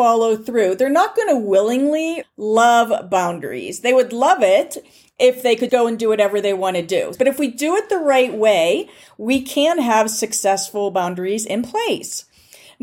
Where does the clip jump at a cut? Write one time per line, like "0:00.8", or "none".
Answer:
0:02.2
0:05.7
0:07.2

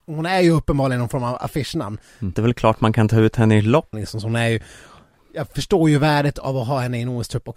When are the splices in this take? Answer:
0:02.3
0:03.9

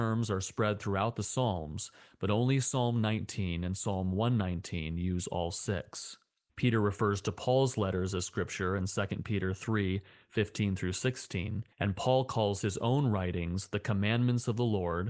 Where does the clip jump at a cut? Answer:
0:06.5
0:11.7

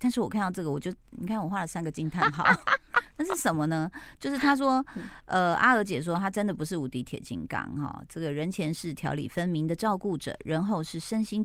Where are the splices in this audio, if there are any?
none

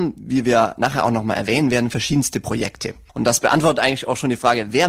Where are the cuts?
0:03.1

